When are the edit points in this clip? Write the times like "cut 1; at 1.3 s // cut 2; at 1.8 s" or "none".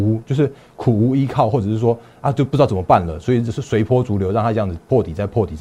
none